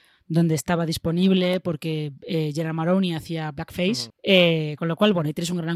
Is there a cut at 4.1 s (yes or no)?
yes